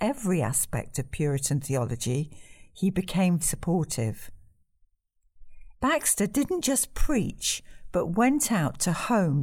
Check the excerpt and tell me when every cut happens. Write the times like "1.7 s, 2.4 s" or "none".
3.4 s, 5.7 s